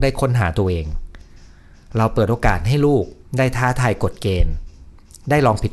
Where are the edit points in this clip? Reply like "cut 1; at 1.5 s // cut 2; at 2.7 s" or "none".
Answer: none